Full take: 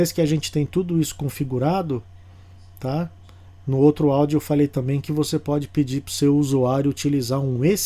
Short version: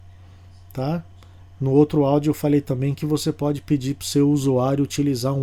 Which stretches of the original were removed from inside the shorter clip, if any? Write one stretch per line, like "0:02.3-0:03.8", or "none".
none